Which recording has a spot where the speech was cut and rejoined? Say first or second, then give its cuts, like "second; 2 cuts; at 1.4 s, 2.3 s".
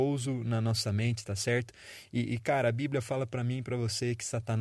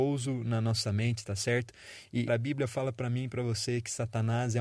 second; 1 cut; at 2.3 s